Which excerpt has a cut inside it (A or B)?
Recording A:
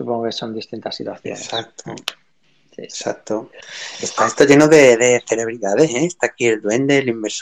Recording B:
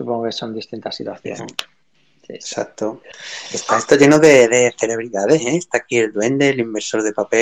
B